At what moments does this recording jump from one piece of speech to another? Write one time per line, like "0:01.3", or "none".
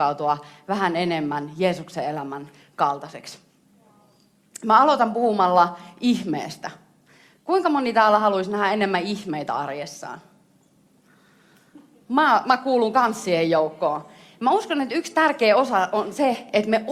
none